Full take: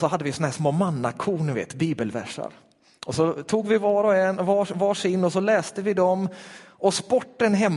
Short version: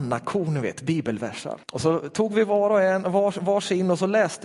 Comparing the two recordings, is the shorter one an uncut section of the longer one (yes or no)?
no